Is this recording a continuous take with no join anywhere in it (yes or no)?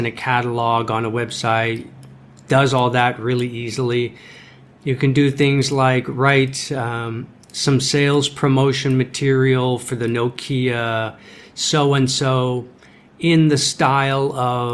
yes